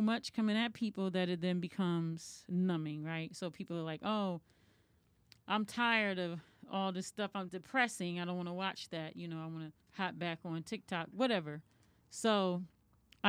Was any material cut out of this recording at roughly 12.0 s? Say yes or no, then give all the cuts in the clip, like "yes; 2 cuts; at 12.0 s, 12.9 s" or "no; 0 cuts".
no; 2 cuts; at 7.5 s, 9.8 s